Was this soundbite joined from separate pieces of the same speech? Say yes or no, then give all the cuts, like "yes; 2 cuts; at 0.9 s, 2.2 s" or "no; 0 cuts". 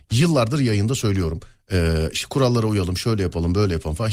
no; 0 cuts